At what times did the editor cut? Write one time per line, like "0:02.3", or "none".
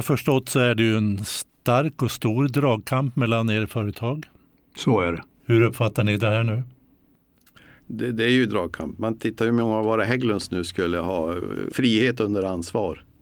0:07.8
0:11.7